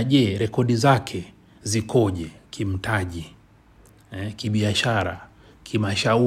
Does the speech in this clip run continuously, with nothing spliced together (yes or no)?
yes